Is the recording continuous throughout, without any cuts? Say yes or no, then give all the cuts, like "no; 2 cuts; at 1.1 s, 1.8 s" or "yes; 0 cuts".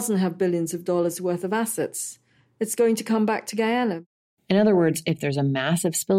yes; 0 cuts